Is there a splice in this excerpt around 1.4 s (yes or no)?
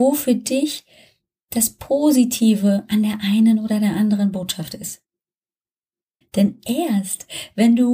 no